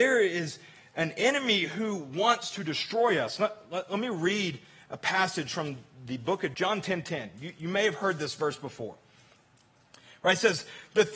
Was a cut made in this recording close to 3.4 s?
no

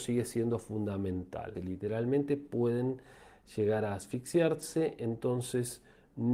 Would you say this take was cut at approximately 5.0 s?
no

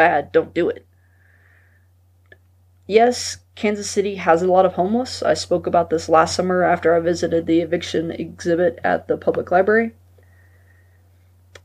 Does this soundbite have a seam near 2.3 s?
no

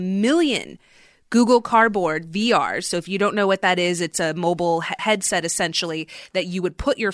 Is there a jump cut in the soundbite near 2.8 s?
no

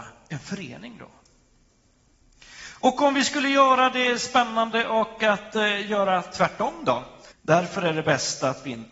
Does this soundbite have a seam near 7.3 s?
yes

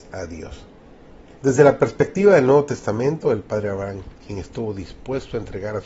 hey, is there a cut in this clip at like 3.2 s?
no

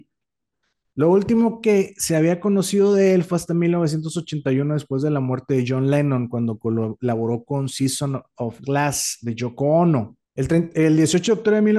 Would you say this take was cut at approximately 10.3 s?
yes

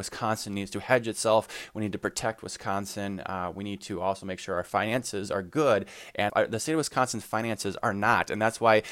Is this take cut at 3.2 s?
no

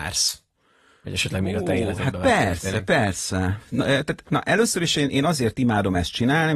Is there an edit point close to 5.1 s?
yes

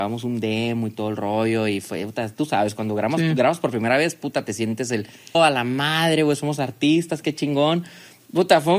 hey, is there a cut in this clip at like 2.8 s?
no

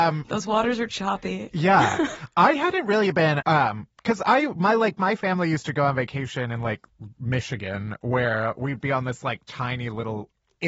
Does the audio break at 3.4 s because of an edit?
yes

